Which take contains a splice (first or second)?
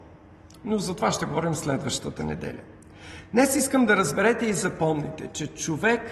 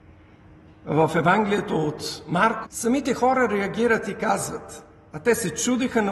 second